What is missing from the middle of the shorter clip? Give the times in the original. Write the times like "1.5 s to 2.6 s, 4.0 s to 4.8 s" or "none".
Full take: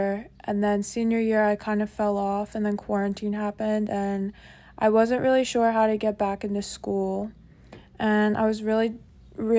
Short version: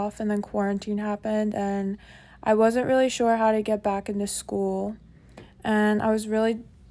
none